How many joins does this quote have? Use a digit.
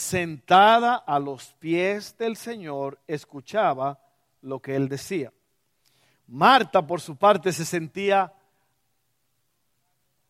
0